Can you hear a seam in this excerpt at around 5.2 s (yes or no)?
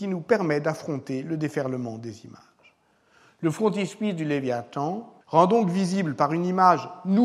yes